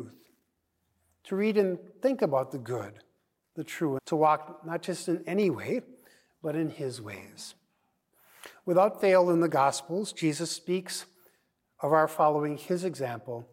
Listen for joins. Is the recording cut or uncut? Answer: cut